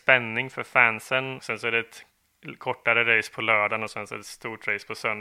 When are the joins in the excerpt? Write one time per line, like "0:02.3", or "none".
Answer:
0:01.4